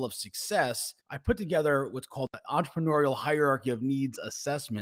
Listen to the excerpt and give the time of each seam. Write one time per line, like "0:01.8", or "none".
0:01.0

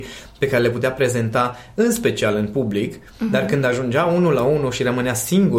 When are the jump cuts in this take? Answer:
none

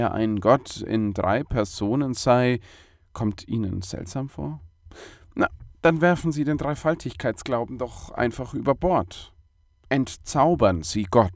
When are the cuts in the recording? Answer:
0:09.8

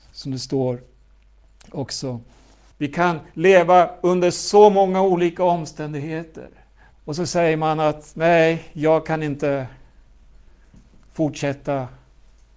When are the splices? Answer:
0:02.7
0:06.9

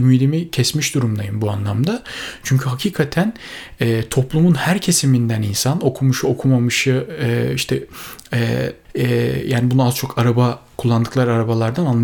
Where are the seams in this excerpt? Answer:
0:08.8

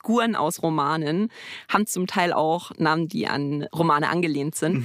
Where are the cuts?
none

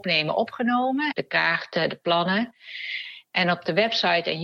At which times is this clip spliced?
0:01.1

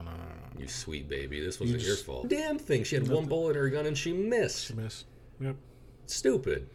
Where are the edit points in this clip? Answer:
0:02.2

